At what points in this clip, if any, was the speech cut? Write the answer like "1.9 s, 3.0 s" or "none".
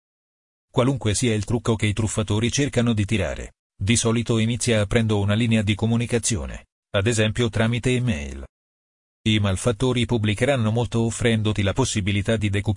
none

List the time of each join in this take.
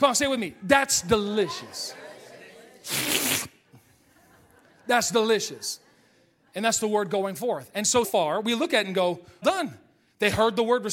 8.0 s, 9.4 s

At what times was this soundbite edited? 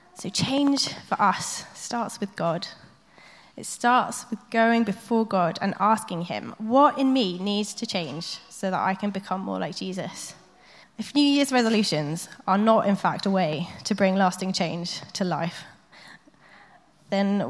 10.8 s

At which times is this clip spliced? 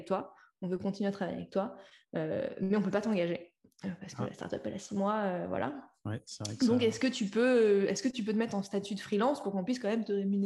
none

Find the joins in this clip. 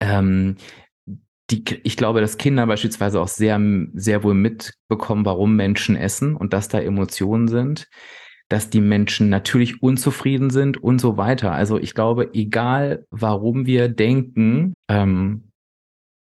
14.7 s

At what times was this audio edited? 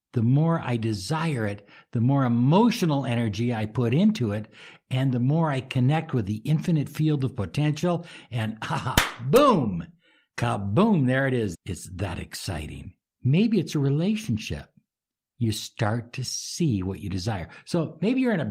11.5 s, 13.1 s

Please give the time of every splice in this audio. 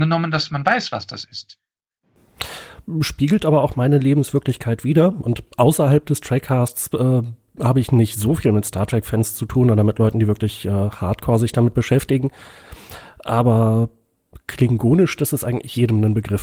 none

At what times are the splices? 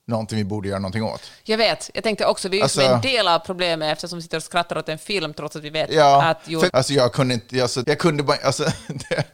6.7 s, 7.8 s

